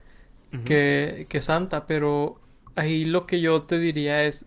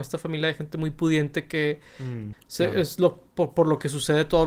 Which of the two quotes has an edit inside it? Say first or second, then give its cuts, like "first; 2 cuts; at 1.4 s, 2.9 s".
second; 1 cut; at 2.3 s